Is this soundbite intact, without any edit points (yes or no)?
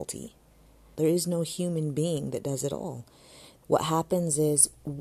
no